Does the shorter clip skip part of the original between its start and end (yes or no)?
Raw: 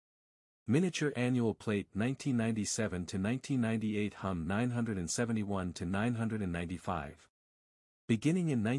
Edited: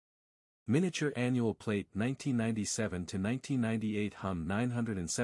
no